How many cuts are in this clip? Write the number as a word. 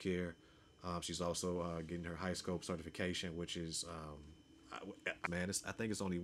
one